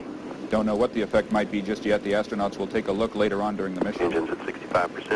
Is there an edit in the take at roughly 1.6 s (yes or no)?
no